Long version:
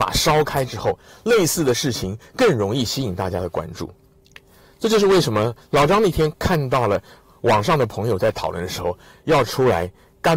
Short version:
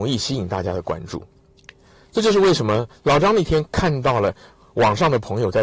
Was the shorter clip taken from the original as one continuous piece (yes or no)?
yes